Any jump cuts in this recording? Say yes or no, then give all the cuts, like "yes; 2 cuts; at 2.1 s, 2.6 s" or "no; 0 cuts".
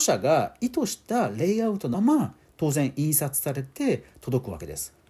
yes; 1 cut; at 1.9 s